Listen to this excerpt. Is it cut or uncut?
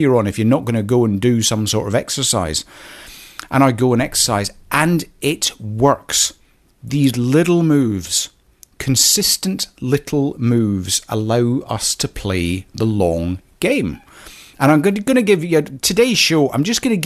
uncut